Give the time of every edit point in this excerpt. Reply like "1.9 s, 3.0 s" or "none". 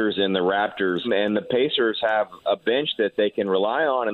1.0 s